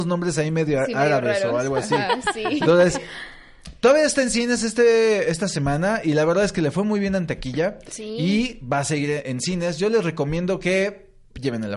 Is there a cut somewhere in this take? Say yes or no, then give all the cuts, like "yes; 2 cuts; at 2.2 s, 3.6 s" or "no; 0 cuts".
no; 0 cuts